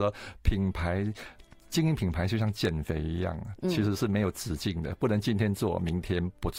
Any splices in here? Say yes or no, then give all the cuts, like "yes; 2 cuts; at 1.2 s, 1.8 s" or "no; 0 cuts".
no; 0 cuts